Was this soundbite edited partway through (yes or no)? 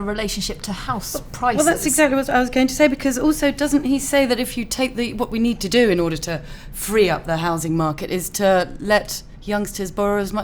no